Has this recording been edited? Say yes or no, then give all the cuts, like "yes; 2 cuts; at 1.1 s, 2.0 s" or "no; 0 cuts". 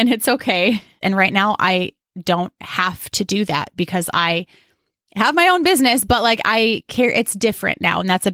yes; 1 cut; at 1.0 s